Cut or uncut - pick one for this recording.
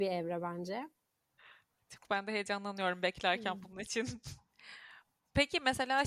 uncut